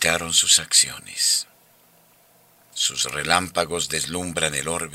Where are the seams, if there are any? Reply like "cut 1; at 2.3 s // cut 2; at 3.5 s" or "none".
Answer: cut 1; at 2.7 s

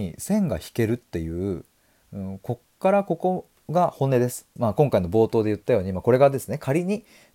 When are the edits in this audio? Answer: cut 1; at 4.6 s

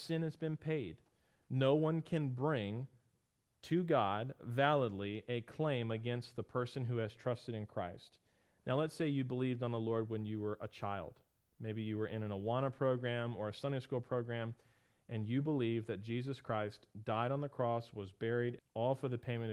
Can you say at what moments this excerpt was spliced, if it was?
cut 1; at 18.6 s

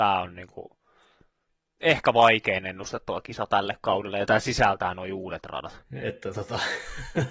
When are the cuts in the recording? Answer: cut 1; at 5.8 s

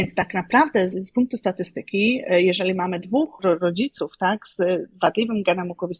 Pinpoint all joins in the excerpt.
cut 1; at 0.9 s

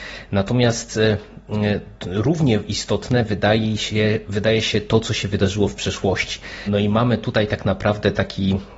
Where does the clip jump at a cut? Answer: cut 1; at 6.7 s

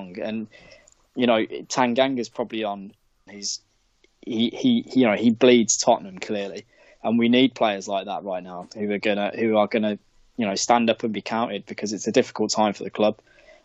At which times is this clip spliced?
cut 1; at 3.3 s

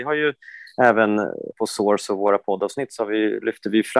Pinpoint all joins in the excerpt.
cut 1; at 1.5 s

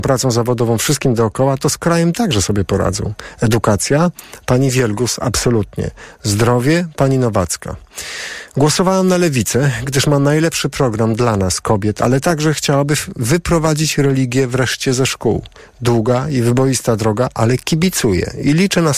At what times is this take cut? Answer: none

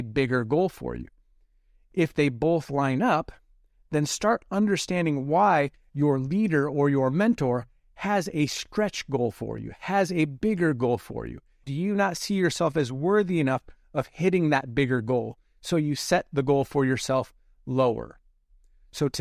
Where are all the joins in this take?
cut 1; at 11.6 s

